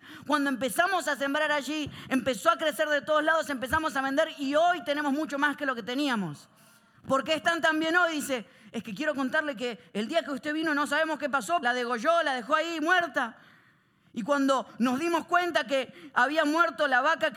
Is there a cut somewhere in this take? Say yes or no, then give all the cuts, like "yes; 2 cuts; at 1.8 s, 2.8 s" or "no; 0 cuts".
yes; 2 cuts; at 6.9 s, 11.6 s